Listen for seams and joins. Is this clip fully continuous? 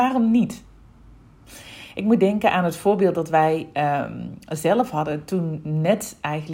yes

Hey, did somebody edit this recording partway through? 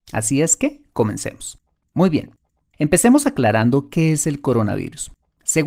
no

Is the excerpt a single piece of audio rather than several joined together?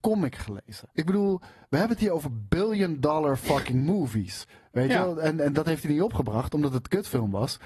no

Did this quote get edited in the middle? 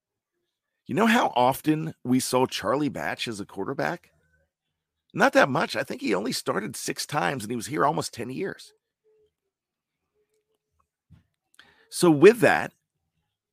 no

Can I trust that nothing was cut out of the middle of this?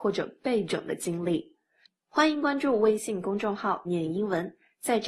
no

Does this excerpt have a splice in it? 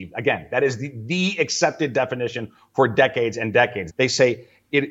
yes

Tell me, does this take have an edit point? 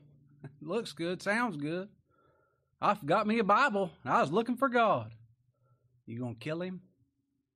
no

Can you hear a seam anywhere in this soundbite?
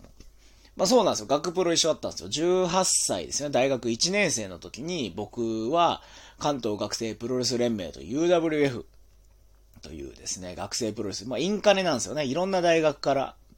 no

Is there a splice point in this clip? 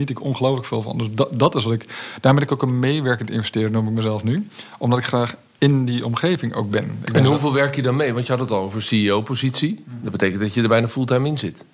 no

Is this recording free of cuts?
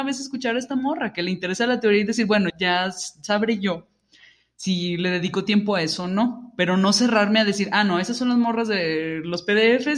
no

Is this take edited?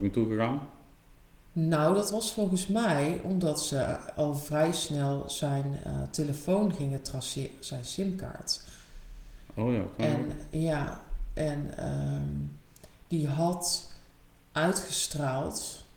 no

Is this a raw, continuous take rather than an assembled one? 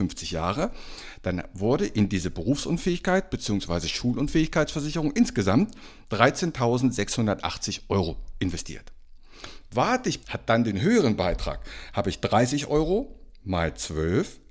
no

